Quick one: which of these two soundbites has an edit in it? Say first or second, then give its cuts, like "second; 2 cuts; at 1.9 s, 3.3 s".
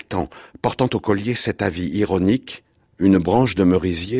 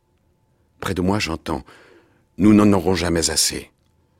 first; 1 cut; at 2.9 s